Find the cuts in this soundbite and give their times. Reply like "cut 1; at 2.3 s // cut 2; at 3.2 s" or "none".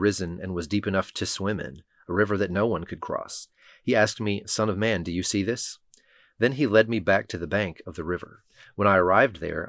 none